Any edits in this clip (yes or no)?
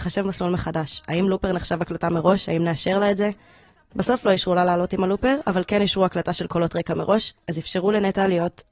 no